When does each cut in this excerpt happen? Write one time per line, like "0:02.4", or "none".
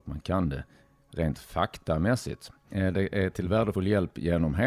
0:02.7